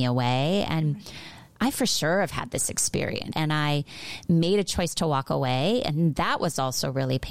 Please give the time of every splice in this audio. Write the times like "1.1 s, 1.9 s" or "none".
3.3 s